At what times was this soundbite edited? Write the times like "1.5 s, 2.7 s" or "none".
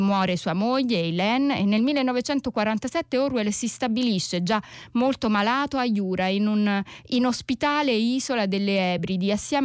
none